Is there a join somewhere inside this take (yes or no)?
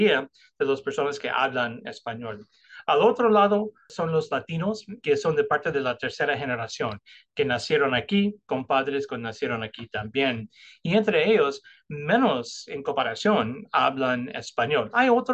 no